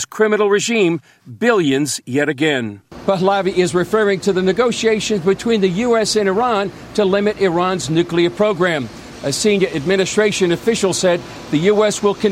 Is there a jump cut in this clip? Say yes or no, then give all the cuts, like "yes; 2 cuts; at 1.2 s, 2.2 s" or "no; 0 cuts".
no; 0 cuts